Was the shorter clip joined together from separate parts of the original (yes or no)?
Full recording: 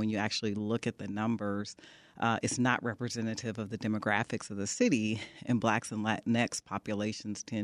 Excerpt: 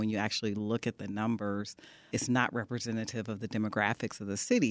yes